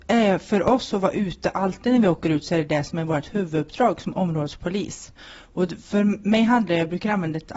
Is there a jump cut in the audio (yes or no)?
no